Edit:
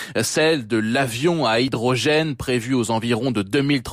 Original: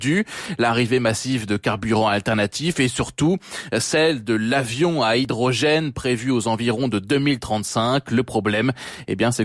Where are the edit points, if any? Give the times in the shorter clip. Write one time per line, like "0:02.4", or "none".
none